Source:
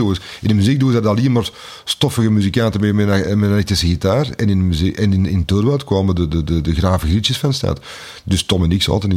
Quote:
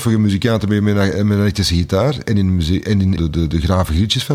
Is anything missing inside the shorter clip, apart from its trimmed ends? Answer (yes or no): yes